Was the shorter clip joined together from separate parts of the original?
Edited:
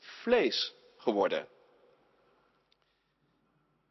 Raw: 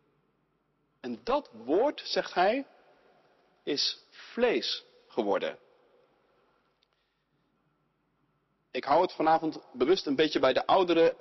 no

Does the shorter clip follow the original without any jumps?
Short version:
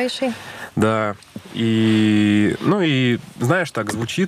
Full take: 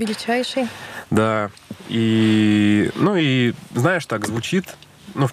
yes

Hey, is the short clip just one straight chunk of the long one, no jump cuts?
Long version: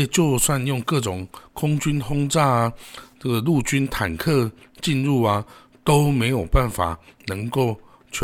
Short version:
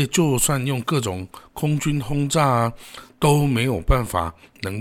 no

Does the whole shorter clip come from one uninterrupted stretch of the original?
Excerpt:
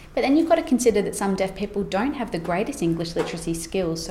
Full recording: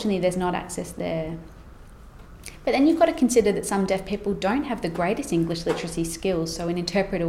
yes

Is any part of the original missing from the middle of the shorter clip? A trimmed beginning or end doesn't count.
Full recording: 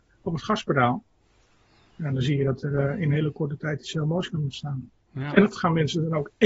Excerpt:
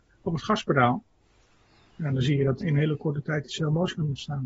yes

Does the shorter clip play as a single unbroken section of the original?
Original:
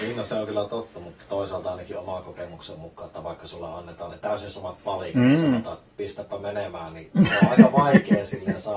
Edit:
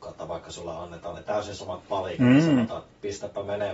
yes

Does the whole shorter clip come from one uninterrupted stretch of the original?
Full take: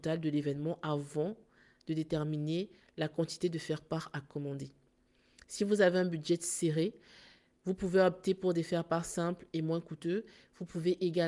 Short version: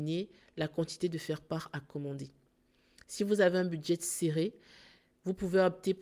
yes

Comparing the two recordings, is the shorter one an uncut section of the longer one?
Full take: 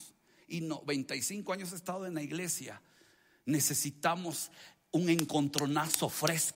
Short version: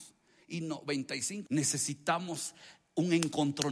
no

